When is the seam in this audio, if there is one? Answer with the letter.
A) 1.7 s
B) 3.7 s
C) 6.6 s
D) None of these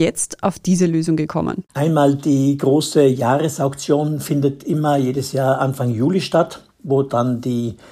A